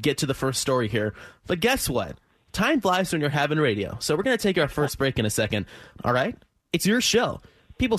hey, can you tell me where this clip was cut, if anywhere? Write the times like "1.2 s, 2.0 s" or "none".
6.0 s